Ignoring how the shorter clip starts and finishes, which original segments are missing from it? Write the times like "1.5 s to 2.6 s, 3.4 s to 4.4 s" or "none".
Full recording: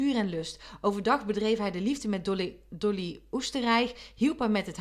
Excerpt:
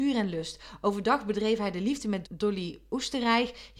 2.2 s to 2.6 s